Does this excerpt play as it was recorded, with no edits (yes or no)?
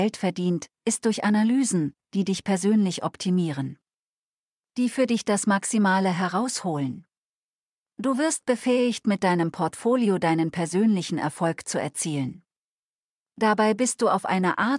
yes